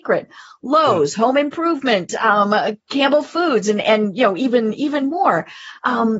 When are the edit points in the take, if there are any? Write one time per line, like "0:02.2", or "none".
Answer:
none